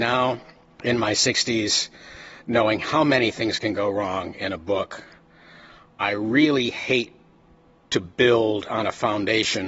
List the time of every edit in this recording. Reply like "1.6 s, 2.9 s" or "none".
none